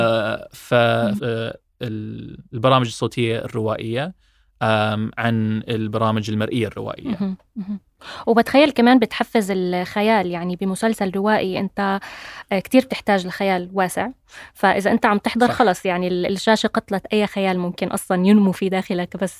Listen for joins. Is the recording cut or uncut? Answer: cut